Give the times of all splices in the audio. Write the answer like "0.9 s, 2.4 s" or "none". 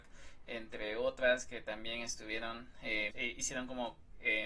3.1 s